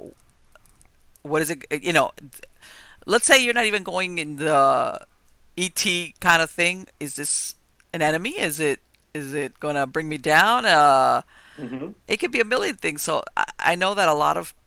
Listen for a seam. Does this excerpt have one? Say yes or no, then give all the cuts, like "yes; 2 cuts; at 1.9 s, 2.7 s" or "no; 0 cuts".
no; 0 cuts